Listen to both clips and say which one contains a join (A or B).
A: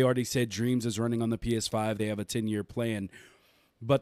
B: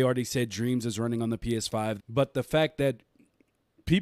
B